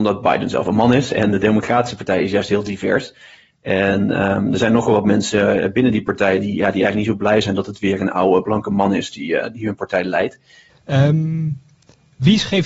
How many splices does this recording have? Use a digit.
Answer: 1